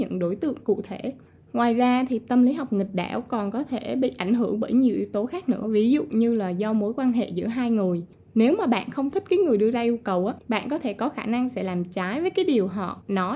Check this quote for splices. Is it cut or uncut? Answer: uncut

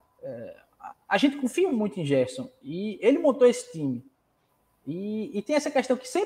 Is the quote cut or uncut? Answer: uncut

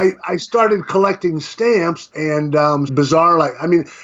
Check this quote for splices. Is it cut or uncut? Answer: cut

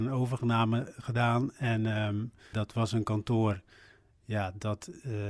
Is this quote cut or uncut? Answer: cut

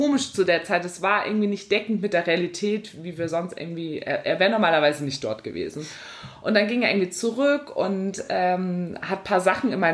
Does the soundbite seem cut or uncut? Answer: uncut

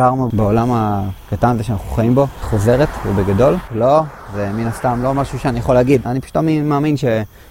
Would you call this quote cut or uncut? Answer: cut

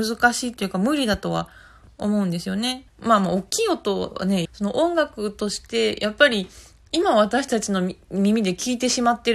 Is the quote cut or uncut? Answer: cut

